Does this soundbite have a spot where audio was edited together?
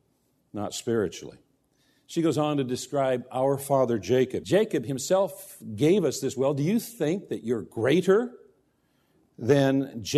yes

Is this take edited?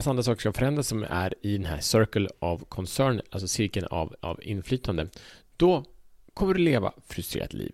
no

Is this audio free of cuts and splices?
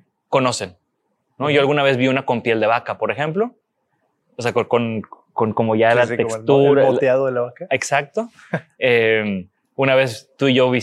yes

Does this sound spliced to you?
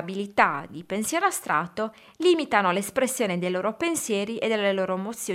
no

